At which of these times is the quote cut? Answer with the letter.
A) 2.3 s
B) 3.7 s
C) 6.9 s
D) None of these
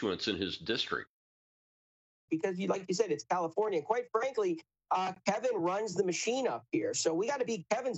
A